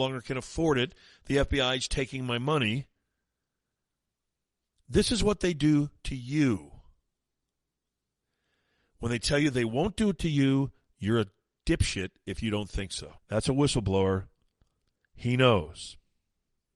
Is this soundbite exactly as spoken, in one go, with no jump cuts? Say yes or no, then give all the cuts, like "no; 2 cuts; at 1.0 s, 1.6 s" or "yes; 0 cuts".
no; 1 cut; at 13.2 s